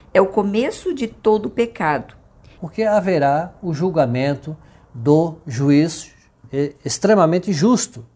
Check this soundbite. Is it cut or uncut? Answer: cut